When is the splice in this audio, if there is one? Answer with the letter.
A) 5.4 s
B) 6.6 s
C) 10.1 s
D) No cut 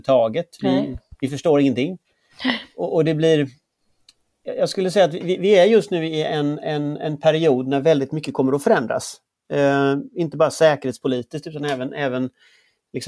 D